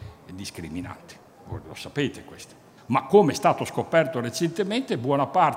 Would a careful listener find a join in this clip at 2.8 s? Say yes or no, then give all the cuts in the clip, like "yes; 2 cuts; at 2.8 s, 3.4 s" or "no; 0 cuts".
yes; 1 cut; at 2.8 s